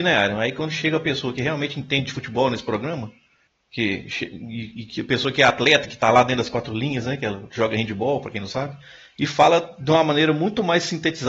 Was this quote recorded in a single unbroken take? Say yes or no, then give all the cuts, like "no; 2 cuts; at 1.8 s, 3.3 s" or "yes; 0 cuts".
yes; 0 cuts